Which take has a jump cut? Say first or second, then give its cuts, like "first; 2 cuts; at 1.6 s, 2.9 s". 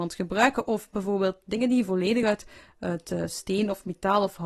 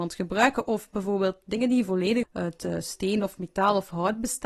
second; 1 cut; at 2.2 s